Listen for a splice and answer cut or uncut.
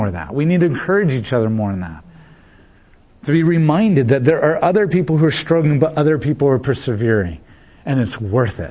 uncut